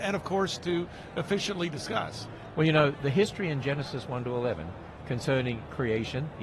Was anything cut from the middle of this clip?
no; 0 cuts

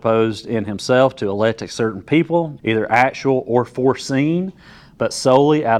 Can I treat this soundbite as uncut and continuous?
no; 1 cut; at 2.6 s

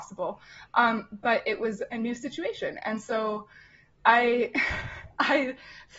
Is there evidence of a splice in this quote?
no; 0 cuts

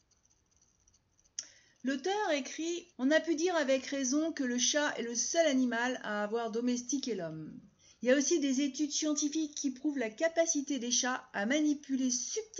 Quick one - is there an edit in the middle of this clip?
yes; 2 cuts; at 2.9 s, 7.9 s

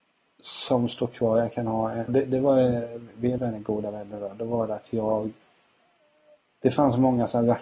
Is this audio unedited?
no; 3 cuts; at 2.1 s, 3.4 s, 6.5 s

